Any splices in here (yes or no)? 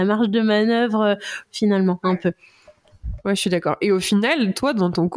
yes